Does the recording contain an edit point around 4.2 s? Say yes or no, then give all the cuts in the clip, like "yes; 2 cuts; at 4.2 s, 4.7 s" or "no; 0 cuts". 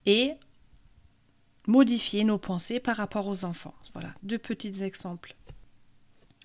yes; 1 cut; at 4.2 s